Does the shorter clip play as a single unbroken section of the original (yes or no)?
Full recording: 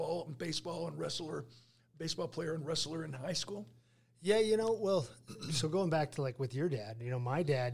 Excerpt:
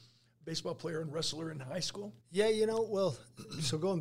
no